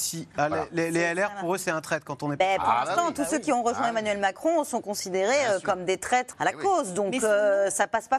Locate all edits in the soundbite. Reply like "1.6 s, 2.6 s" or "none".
6.3 s